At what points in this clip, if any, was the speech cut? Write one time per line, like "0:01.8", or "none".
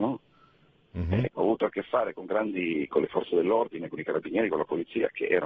0:01.3